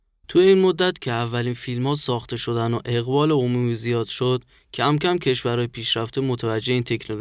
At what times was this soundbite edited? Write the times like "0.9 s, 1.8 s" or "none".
none